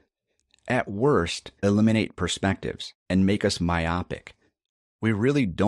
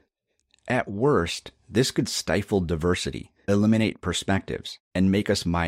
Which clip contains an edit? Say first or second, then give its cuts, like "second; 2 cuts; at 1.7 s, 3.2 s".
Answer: first; 1 cut; at 1.6 s